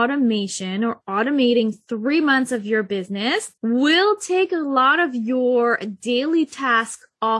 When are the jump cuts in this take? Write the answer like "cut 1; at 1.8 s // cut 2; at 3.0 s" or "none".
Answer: cut 1; at 3.6 s

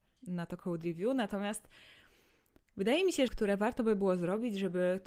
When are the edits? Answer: cut 1; at 3.3 s

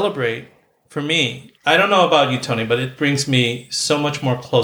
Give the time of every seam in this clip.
cut 1; at 1.6 s // cut 2; at 3.0 s

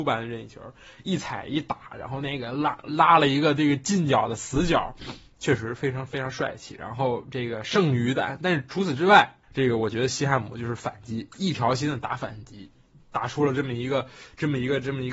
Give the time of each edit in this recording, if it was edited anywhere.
cut 1; at 9.4 s // cut 2; at 13.0 s

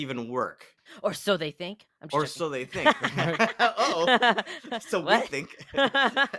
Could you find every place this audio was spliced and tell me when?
none

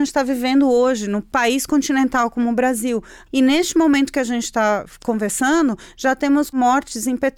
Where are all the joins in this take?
cut 1; at 3.3 s

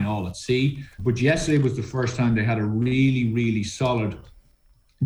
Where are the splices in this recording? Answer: cut 1; at 1.0 s

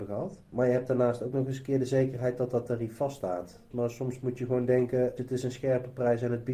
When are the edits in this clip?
cut 1; at 3.7 s // cut 2; at 5.2 s

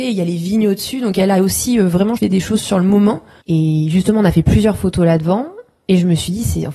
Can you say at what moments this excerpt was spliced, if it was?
cut 1; at 2.2 s // cut 2; at 3.4 s

